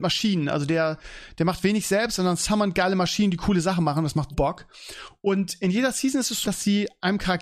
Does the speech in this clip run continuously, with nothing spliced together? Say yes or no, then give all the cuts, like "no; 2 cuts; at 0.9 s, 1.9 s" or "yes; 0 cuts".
no; 2 cuts; at 4.3 s, 6.4 s